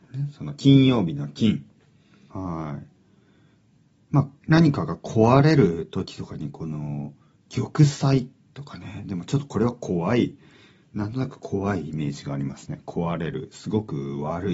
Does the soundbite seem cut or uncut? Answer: cut